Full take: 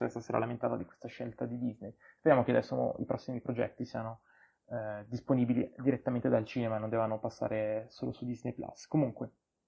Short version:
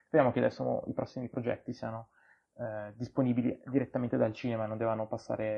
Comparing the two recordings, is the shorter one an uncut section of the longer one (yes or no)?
yes